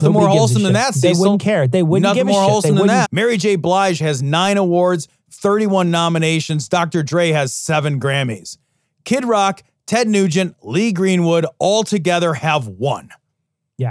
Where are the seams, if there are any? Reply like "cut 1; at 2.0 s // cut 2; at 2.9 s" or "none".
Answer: cut 1; at 3.0 s

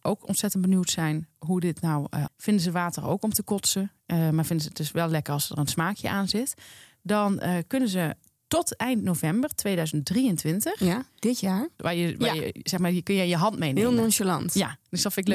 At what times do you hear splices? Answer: cut 1; at 2.3 s // cut 2; at 11.8 s

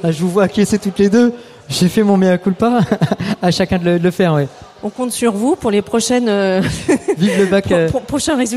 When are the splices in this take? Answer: none

